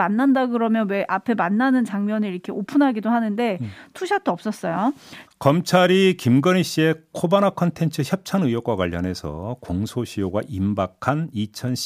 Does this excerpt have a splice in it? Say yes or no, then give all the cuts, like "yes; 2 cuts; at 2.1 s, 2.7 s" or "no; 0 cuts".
yes; 1 cut; at 5.3 s